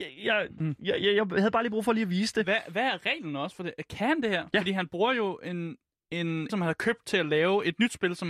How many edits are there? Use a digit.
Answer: 1